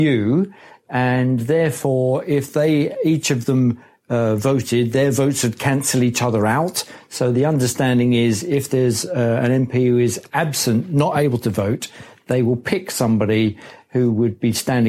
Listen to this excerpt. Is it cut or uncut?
uncut